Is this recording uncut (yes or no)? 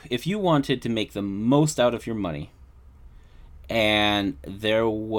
yes